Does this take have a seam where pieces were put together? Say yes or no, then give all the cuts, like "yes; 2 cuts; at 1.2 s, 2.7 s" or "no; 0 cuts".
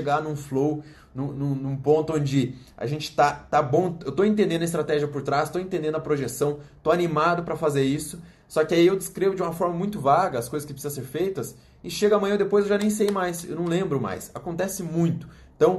no; 0 cuts